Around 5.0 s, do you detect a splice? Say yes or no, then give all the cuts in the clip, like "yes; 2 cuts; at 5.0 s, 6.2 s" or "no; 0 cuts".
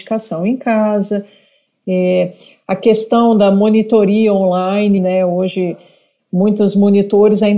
yes; 1 cut; at 5.0 s